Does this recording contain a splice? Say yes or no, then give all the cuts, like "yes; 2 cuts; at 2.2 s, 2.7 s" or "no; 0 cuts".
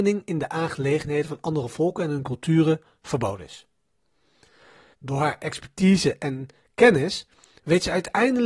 yes; 1 cut; at 4.9 s